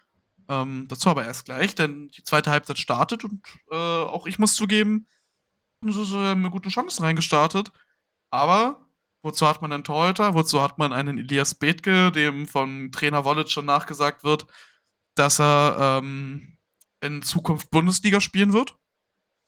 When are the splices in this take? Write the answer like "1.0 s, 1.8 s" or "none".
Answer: 5.8 s